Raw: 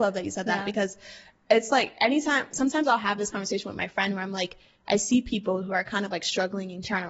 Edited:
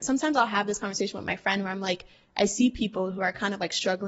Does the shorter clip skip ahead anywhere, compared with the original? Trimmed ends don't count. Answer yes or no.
no